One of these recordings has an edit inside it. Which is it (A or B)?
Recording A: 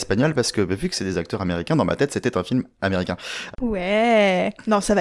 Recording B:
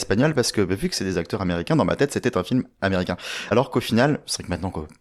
A